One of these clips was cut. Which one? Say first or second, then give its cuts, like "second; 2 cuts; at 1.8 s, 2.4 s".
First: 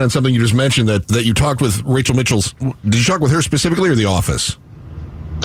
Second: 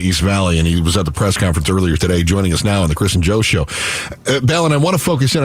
first; 1 cut; at 1.0 s